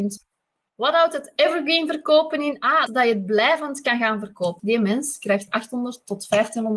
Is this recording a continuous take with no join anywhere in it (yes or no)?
no